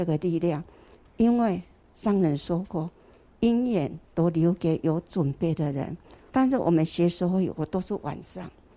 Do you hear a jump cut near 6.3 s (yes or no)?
yes